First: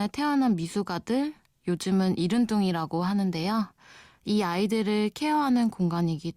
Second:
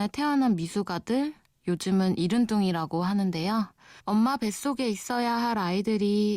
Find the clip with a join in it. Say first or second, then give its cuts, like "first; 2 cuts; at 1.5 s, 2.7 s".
second; 1 cut; at 4.0 s